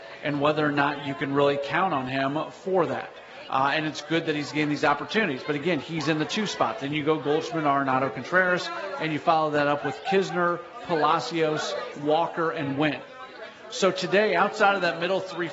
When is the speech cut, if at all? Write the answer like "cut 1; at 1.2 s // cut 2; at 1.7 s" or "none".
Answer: cut 1; at 3.5 s